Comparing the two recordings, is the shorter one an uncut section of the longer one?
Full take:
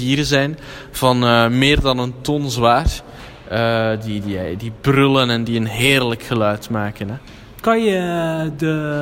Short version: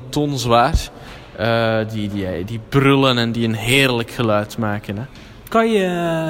yes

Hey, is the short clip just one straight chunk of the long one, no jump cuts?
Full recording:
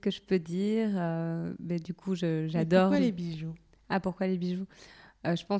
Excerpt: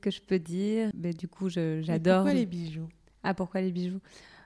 no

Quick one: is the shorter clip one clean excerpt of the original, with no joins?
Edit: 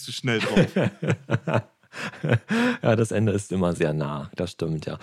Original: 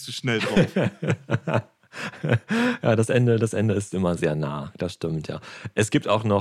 no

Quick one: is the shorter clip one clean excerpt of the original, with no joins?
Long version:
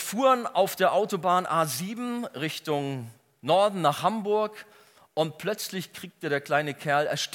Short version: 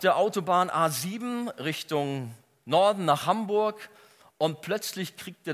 yes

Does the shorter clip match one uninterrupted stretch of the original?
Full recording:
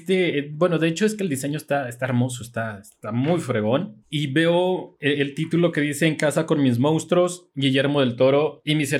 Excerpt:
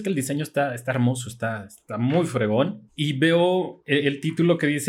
yes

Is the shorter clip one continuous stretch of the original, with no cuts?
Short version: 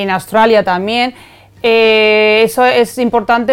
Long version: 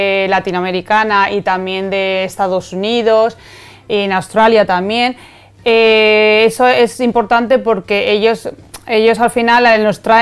yes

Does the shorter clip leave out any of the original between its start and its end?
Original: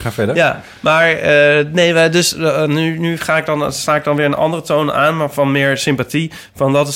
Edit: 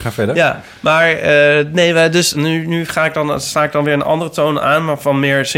yes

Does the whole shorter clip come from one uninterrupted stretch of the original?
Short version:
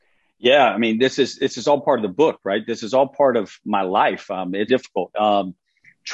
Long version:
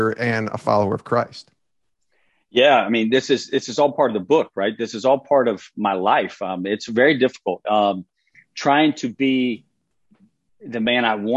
no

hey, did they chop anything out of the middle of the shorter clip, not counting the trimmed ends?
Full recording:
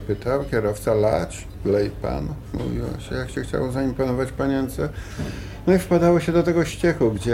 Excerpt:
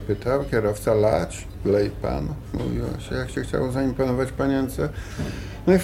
no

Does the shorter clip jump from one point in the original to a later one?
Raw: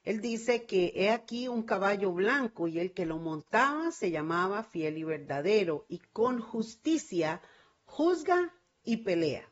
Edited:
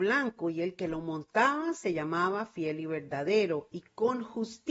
no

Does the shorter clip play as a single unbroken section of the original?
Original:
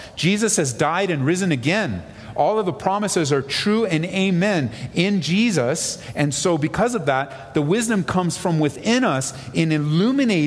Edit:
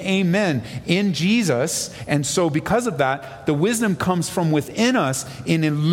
yes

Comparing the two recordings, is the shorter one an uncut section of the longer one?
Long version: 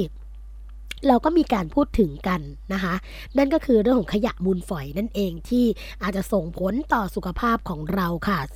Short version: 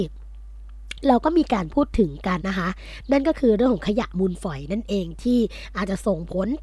no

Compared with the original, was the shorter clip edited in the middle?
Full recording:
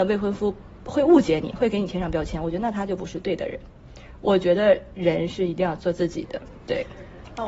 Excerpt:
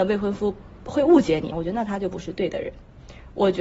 yes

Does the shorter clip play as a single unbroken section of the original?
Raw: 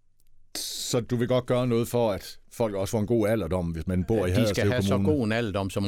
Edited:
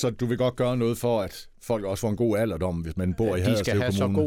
yes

